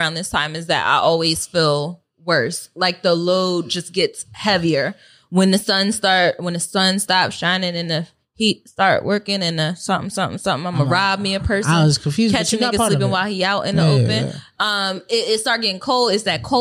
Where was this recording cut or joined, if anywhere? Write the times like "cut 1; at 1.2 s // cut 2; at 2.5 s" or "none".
none